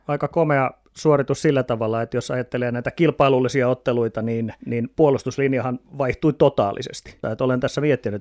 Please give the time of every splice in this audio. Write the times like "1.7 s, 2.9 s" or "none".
7.2 s